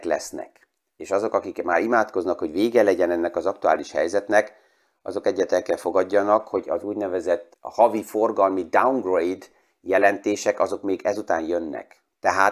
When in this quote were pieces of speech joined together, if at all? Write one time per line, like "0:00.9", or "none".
0:07.5